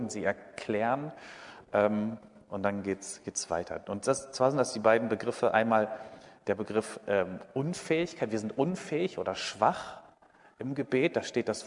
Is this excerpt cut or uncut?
uncut